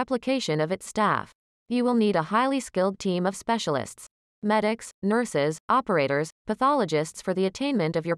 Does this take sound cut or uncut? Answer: uncut